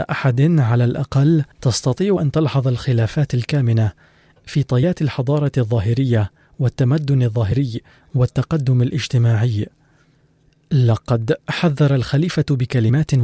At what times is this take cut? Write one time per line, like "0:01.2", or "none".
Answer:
0:01.5